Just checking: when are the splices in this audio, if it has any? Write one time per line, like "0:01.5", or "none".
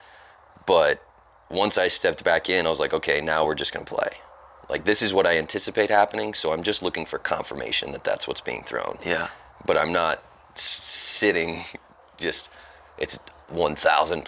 none